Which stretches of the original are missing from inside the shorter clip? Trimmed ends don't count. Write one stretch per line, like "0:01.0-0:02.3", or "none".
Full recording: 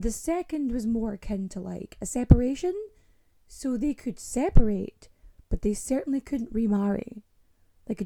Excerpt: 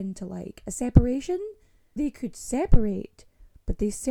0:03.3-0:03.8